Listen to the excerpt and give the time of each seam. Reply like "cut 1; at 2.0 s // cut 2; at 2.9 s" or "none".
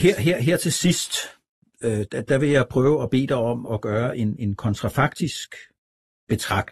cut 1; at 3.7 s